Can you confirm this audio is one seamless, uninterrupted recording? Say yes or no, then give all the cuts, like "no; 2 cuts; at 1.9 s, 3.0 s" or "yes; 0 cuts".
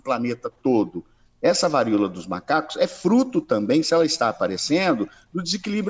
yes; 0 cuts